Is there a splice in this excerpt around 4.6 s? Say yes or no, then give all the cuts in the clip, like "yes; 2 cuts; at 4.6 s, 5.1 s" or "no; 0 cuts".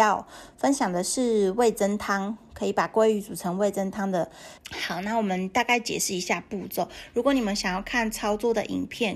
yes; 1 cut; at 4.6 s